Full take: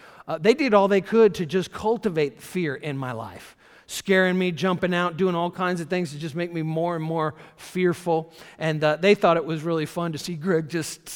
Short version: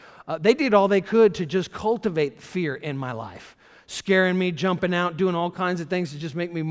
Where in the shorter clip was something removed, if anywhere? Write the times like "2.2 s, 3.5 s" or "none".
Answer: none